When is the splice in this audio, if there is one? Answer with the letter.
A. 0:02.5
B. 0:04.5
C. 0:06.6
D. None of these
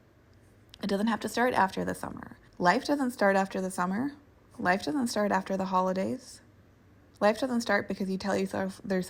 A